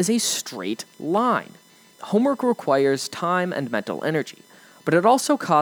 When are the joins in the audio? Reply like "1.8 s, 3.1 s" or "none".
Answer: 1.9 s